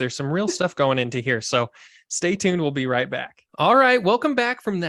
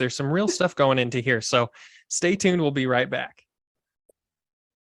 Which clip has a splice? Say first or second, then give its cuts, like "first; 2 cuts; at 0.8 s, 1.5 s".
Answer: first; 1 cut; at 3.5 s